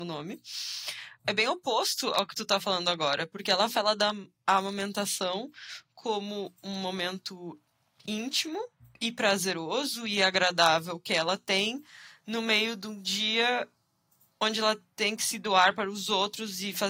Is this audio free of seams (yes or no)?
yes